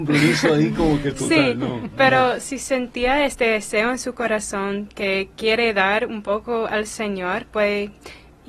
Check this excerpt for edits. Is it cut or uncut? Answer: uncut